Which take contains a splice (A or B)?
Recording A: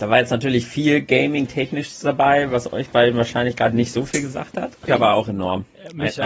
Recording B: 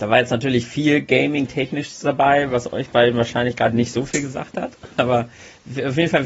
A